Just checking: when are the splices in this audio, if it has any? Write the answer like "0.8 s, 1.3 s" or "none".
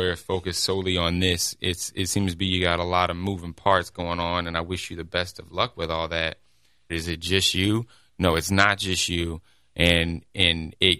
6.9 s